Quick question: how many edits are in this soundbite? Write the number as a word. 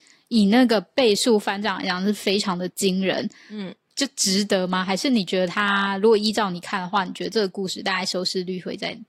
one